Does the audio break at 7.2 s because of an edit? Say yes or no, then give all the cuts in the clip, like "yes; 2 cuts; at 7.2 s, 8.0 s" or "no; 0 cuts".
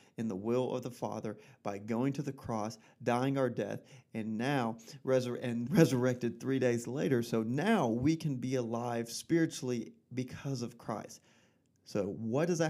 no; 1 cut; at 5.7 s